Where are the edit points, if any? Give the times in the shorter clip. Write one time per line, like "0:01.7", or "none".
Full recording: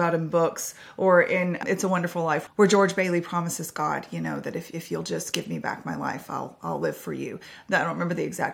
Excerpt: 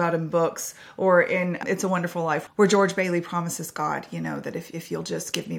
none